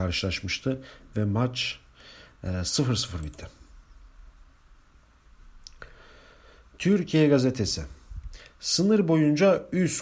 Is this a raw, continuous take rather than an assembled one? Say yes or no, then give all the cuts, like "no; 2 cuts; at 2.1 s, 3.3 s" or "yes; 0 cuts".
yes; 0 cuts